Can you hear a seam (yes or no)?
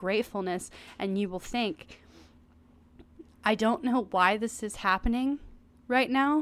no